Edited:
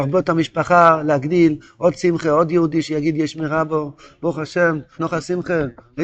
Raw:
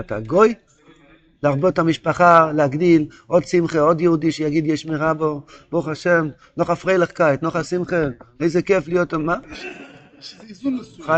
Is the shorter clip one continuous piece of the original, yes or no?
no